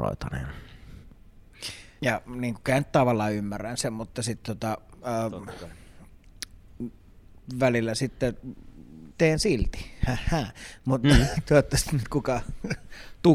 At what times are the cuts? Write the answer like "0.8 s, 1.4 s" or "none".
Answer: 2.0 s, 9.1 s